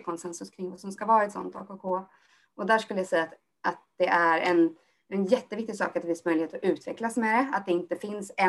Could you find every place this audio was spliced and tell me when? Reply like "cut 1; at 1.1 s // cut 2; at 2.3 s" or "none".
none